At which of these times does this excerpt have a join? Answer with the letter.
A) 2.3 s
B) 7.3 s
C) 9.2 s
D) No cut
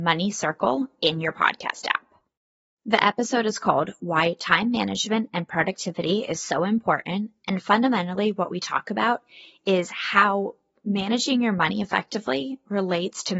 D